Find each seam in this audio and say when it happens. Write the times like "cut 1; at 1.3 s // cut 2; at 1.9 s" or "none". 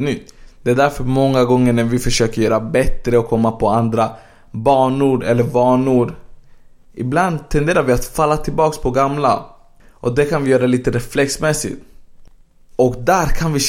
none

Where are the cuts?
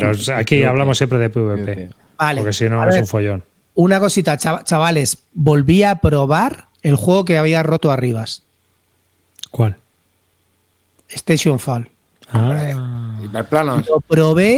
cut 1; at 6.7 s

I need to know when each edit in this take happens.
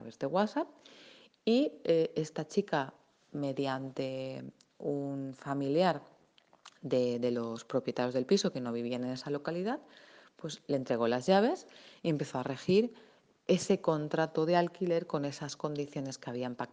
none

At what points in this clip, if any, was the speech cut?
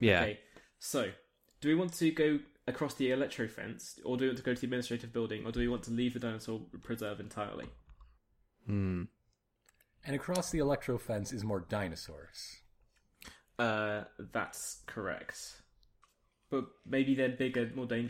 none

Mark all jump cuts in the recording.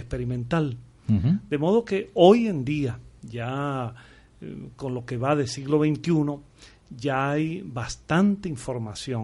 none

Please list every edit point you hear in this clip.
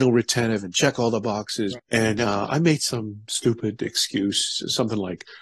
cut 1; at 1.8 s

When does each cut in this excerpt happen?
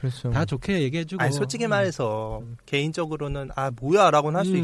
none

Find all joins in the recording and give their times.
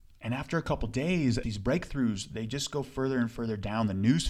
cut 1; at 1.4 s

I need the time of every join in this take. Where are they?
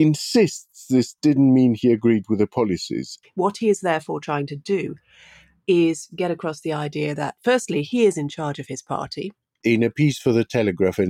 cut 1; at 3.2 s // cut 2; at 9.6 s

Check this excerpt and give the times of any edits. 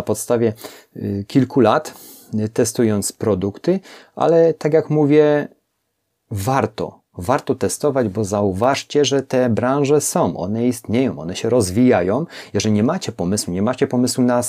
none

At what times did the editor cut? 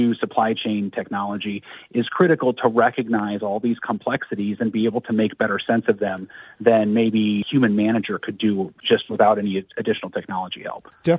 none

